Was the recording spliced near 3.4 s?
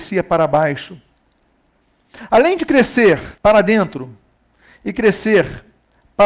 yes; 1 cut; at 3.4 s

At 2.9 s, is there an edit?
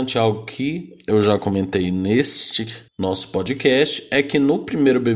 yes; 1 cut; at 2.9 s

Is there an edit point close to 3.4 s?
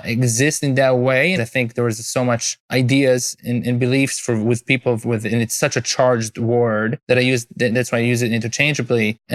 no; 1 cut; at 1.4 s

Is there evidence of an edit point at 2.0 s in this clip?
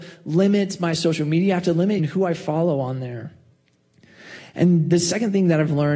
yes; 1 cut; at 2.0 s

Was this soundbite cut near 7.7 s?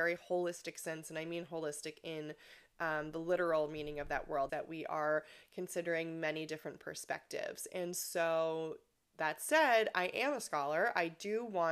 no; 1 cut; at 4.5 s

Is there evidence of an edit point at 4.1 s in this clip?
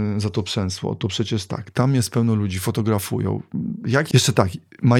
yes; 1 cut; at 4.1 s

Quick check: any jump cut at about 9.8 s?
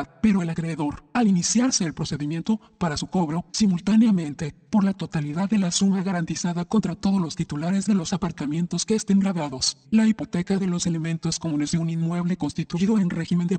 yes; 2 cuts; at 3.5 s, 9.8 s

